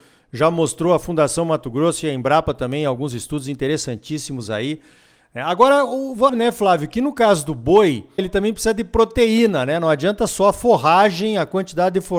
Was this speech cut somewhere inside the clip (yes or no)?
yes